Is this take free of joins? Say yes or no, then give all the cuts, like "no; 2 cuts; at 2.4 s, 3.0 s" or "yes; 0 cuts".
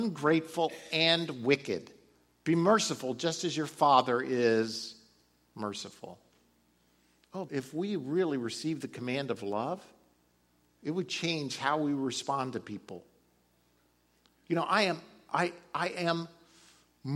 no; 1 cut; at 7.5 s